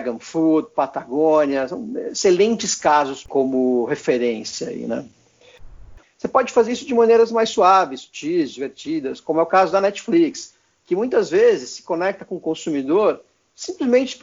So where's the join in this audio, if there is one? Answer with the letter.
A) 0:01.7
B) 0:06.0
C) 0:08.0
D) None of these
B